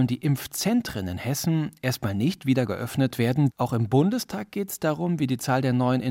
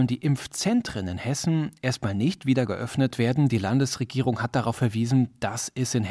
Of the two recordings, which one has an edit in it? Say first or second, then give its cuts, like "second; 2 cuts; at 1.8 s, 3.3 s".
first; 1 cut; at 3.5 s